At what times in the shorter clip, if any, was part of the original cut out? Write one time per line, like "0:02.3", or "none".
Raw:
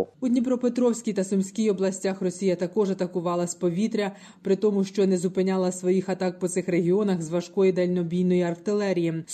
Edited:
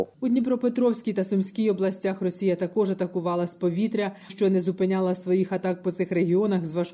0:04.3